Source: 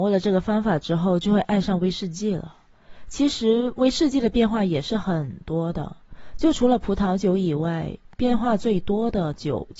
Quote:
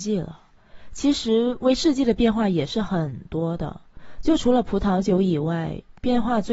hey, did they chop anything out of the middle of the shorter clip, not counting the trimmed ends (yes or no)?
no